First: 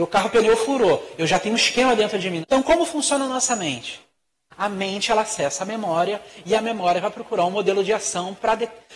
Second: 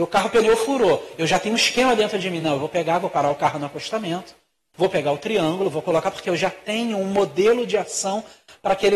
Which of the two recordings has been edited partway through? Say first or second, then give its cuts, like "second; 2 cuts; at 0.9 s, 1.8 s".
first; 1 cut; at 2.4 s